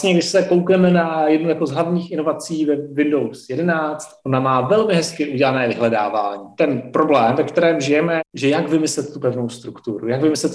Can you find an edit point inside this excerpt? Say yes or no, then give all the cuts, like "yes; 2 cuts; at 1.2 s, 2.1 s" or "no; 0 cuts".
yes; 2 cuts; at 6.6 s, 8.2 s